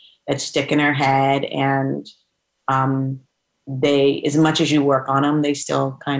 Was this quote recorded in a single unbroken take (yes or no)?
yes